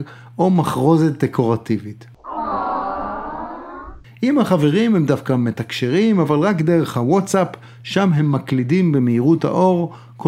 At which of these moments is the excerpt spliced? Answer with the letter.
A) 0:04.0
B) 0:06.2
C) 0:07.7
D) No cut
A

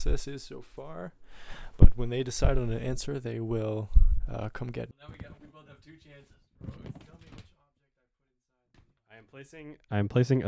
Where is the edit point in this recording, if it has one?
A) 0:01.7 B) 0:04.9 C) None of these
B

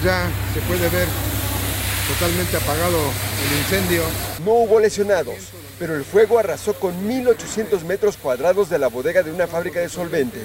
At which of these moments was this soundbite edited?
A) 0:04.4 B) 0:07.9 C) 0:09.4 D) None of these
A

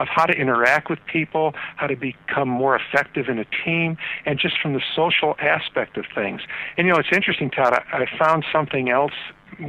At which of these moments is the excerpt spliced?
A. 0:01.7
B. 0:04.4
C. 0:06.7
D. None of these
C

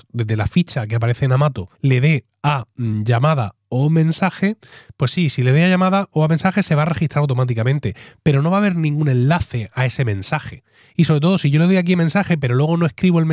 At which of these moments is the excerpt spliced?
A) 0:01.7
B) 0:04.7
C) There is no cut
A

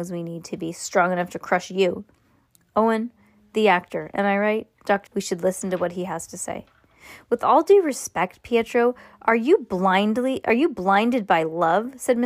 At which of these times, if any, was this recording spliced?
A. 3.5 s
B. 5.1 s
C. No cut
B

